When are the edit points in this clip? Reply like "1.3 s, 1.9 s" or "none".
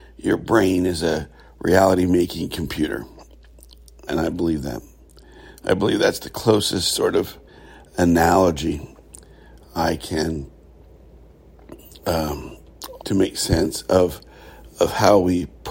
4.1 s, 13.0 s